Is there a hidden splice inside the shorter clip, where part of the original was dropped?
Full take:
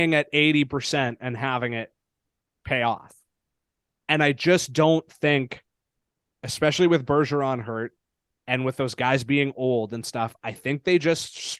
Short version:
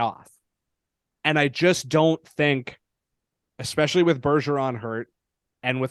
no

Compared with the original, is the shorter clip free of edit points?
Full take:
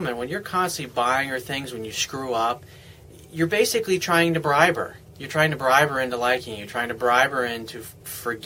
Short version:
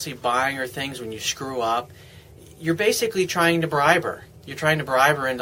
yes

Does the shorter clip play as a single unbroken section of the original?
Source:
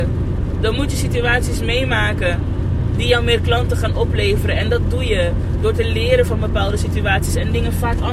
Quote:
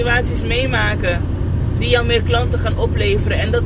yes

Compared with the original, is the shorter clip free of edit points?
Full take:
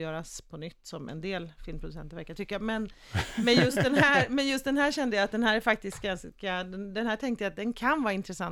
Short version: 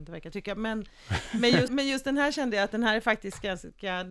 no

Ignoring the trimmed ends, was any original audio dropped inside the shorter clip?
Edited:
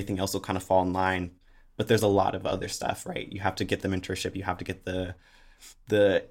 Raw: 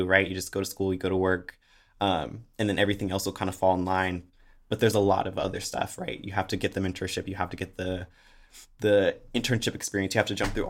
no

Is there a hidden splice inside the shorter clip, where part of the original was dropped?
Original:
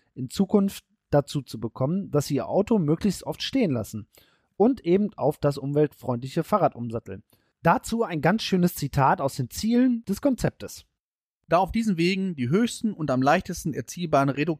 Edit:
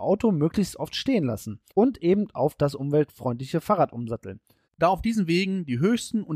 yes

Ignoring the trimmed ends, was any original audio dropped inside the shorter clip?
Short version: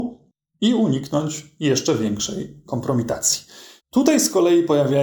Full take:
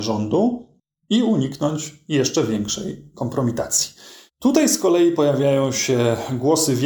no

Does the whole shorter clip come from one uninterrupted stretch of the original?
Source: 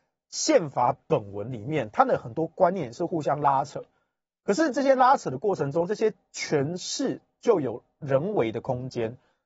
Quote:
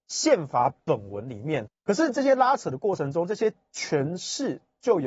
no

